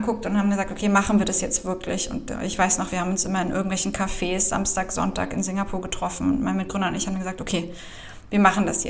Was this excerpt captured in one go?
yes; 0 cuts

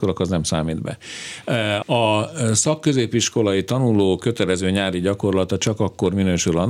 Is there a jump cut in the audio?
yes; 1 cut; at 1.8 s

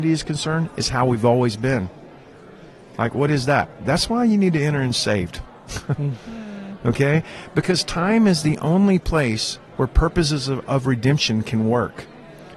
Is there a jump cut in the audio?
no; 0 cuts

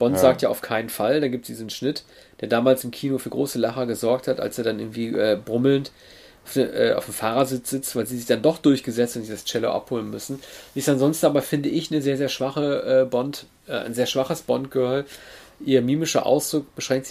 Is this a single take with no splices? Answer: yes; 0 cuts

